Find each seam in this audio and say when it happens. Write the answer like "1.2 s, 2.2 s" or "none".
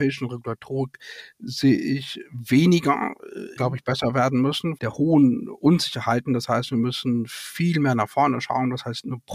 3.6 s, 4.8 s